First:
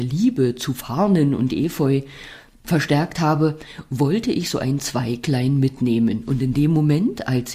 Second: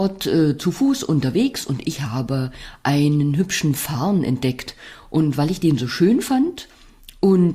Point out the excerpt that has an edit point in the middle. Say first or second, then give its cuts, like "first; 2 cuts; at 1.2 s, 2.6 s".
first; 1 cut; at 2.6 s